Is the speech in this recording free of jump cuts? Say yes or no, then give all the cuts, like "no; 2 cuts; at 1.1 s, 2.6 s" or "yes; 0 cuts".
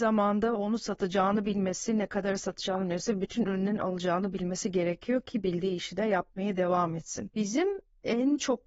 yes; 0 cuts